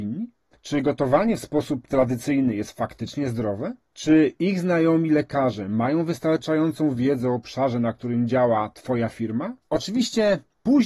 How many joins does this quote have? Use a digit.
1